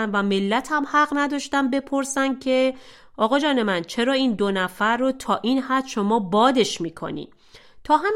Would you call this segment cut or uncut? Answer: uncut